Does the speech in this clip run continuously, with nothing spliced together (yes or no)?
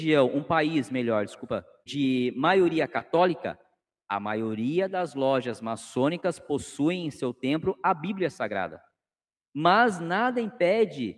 no